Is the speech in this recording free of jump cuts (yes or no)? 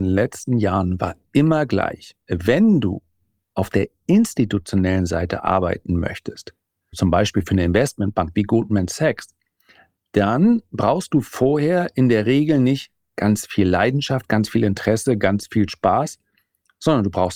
no